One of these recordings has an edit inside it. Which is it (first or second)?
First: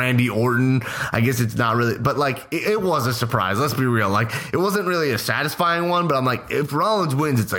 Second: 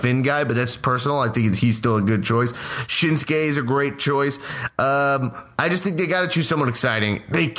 second